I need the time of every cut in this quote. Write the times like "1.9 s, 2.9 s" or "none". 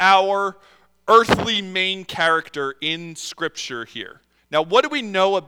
4.4 s